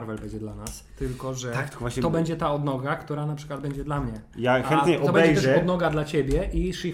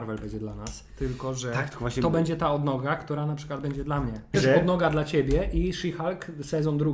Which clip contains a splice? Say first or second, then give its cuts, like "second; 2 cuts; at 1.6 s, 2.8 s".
second; 1 cut; at 4.3 s